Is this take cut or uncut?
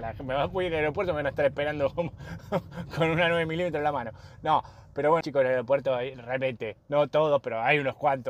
cut